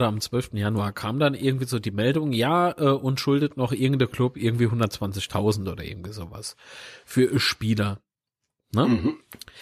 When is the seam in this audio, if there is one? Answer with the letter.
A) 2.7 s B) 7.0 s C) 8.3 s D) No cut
D